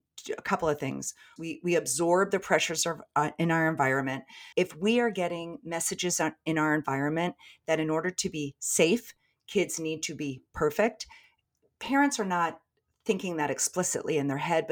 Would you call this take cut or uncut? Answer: cut